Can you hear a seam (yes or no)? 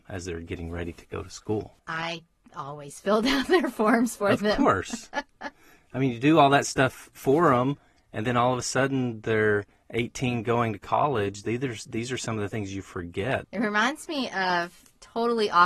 yes